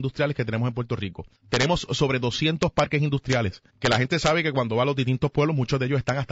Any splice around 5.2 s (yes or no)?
no